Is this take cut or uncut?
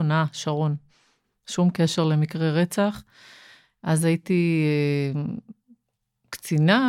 uncut